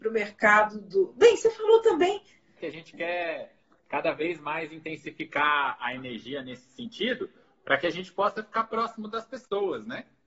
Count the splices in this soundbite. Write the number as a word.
one